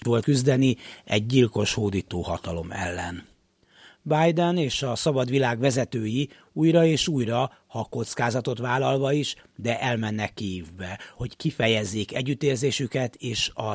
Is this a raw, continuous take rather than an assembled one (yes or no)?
yes